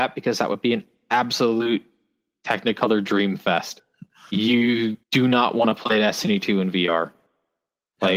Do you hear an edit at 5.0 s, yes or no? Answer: yes